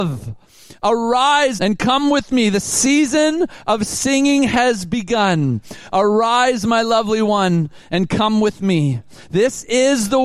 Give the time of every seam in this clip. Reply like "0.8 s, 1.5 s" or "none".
1.6 s